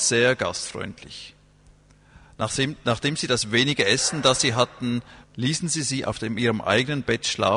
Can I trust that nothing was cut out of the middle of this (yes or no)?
no